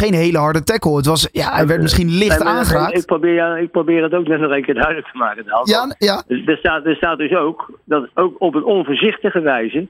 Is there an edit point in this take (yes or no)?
no